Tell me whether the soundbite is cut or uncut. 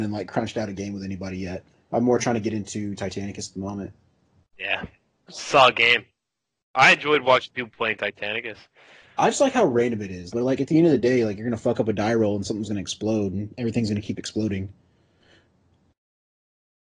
cut